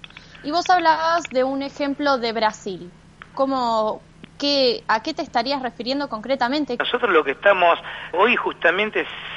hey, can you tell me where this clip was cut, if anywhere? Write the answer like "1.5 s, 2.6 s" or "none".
3.3 s, 6.8 s, 8.1 s